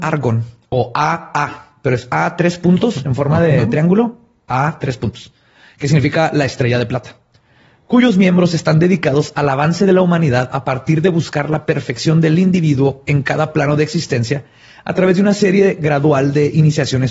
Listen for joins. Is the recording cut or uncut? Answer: uncut